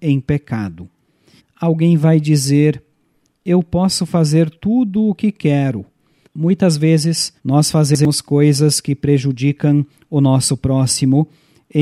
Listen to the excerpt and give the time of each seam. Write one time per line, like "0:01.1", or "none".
0:01.4
0:06.2
0:07.4